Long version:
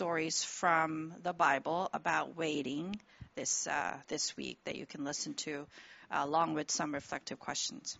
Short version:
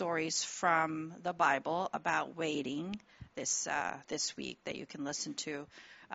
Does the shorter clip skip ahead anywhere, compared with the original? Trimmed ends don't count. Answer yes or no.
no